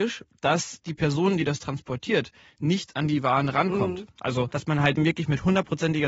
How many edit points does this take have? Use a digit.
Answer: 1